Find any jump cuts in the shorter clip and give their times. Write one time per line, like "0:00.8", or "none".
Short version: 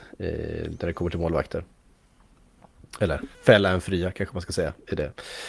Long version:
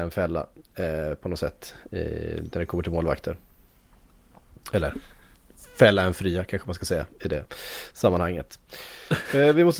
0:03.3